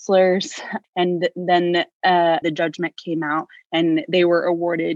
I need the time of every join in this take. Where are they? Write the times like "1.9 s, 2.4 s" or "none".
2.4 s